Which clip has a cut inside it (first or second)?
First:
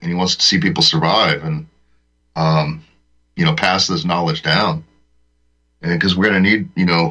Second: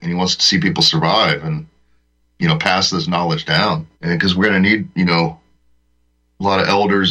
second